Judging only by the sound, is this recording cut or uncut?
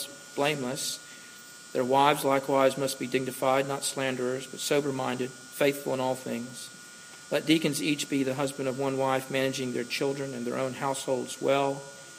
uncut